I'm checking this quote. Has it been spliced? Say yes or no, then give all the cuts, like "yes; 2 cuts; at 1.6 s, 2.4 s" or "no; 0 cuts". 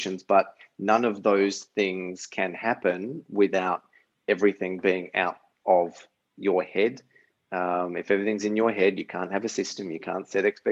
no; 0 cuts